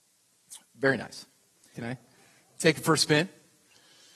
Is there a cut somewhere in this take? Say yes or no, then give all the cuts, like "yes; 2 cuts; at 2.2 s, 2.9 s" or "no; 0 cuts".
yes; 1 cut; at 1.7 s